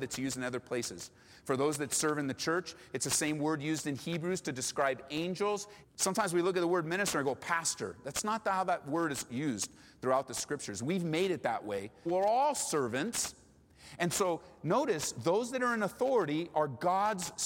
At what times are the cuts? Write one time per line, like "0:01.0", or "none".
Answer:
0:05.8
0:12.1